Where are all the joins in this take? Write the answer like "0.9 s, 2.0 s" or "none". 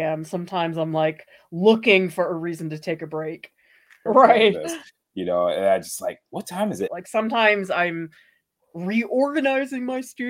4.1 s, 6.9 s